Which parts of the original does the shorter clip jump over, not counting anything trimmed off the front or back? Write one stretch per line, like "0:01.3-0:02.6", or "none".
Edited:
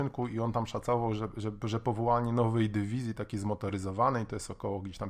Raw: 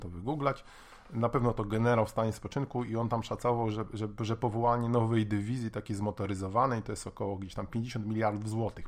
none